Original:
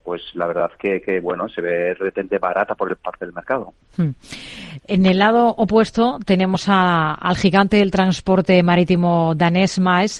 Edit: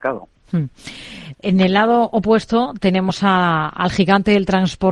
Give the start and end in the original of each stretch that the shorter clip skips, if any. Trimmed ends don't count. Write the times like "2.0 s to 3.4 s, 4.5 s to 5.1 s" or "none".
none